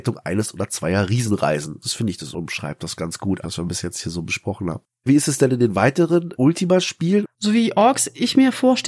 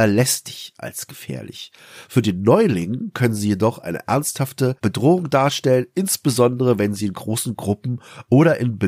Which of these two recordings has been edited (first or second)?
first